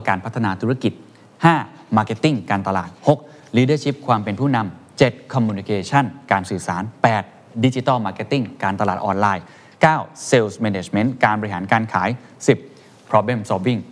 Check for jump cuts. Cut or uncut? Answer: uncut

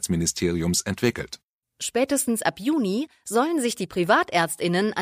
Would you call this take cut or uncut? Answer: cut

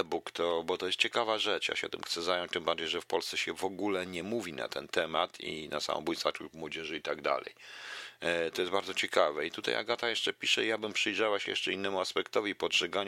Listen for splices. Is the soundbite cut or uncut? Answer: uncut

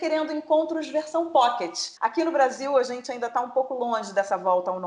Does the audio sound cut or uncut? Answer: cut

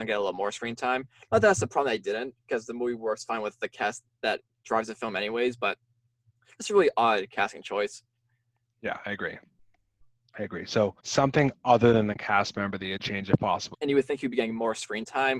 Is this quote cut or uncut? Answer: cut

